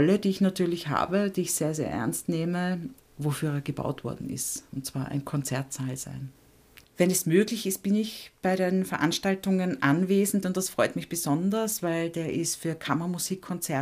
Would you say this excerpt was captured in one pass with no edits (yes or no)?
no